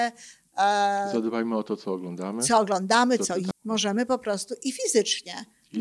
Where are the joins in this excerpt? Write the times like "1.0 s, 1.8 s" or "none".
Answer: 3.5 s